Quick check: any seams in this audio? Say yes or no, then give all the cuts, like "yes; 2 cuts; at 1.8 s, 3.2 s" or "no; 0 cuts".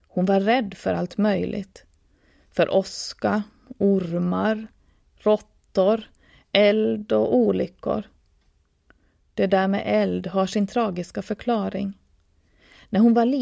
no; 0 cuts